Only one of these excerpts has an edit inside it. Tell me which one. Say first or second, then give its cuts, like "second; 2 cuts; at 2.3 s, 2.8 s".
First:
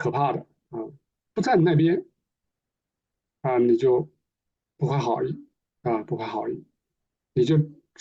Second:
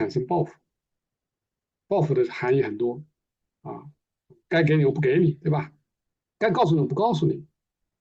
first; 1 cut; at 1.3 s